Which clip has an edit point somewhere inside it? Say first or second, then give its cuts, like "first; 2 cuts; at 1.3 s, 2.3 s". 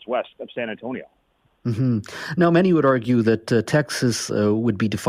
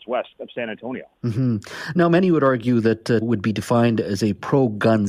second; 2 cuts; at 1.1 s, 3.2 s